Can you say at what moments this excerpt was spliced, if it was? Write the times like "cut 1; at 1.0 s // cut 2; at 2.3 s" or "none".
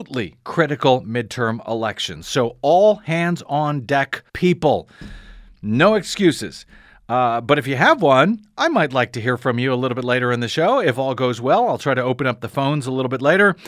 cut 1; at 4.3 s